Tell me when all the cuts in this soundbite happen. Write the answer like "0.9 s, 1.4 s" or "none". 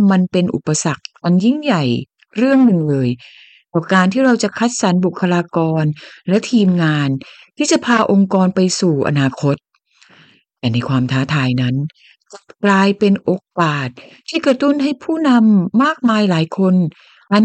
none